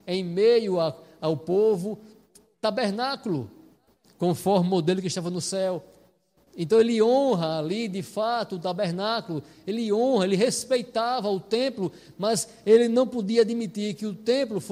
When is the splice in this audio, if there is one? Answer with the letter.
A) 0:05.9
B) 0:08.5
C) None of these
C